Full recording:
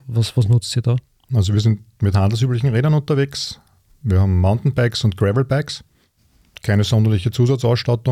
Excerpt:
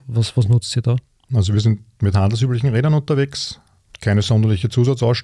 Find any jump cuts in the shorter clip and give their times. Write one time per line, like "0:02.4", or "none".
0:03.9

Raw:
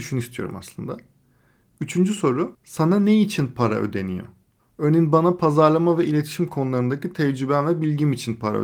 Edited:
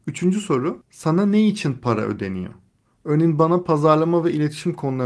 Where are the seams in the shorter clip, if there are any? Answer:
none

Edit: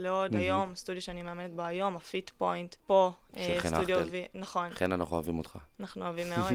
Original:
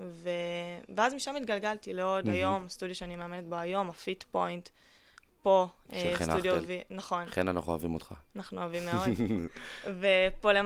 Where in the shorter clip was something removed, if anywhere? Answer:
0:02.8

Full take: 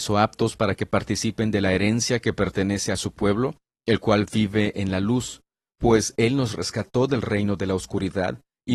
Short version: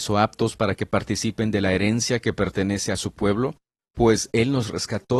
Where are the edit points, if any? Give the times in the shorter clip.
0:03.8

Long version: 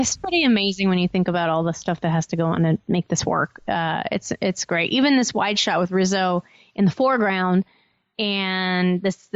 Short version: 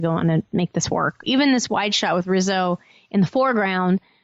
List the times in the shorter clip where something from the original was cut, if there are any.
0:01.2

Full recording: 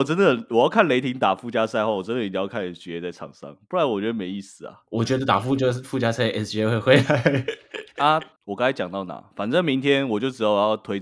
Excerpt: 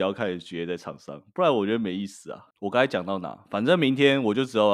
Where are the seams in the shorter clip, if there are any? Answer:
0:02.5

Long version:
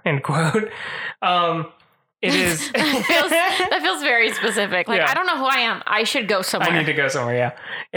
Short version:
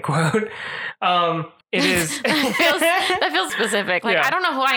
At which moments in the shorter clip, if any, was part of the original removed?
0:01.6
0:03.5

